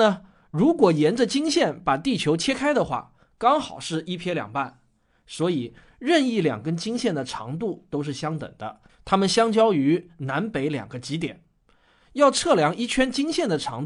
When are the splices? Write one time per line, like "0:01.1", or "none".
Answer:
none

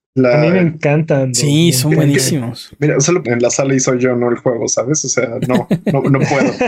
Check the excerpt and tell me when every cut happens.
0:03.2

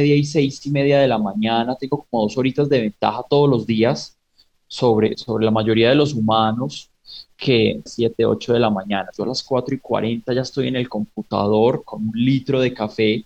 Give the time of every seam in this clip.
0:05.1
0:07.9
0:09.1

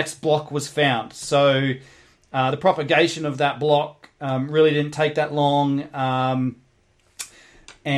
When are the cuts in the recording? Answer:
none

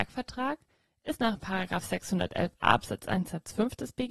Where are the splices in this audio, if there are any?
none

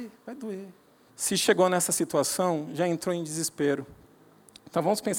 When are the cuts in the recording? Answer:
0:01.1

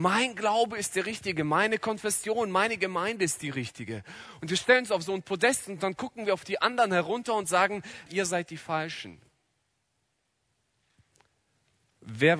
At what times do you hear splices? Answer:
0:08.1

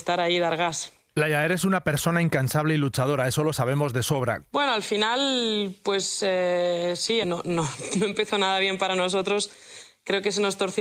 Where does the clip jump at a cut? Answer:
0:04.5
0:07.2

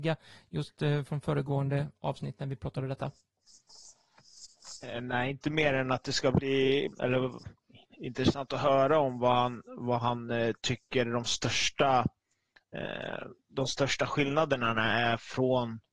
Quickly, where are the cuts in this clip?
0:06.9
0:13.5

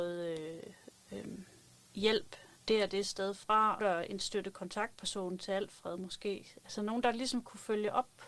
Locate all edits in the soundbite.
0:03.8

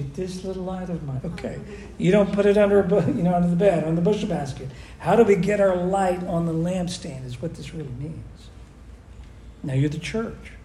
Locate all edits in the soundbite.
0:01.2

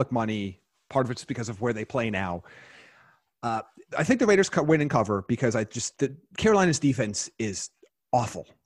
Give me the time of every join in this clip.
0:03.9
0:05.9

